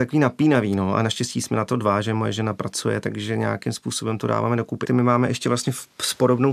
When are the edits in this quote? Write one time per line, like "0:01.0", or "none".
0:04.8

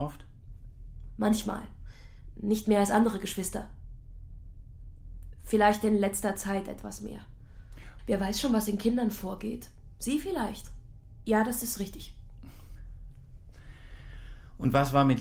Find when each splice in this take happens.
0:08.0
0:11.2

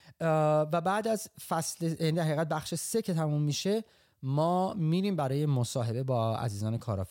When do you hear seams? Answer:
none

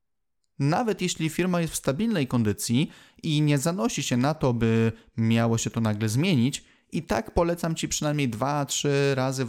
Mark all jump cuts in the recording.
none

